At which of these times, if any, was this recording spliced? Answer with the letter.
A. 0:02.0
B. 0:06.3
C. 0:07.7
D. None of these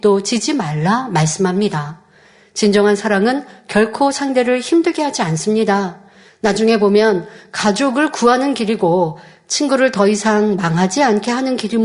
B